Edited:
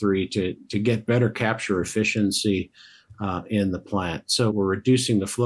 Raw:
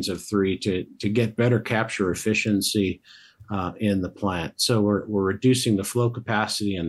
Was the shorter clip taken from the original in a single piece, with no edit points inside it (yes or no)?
no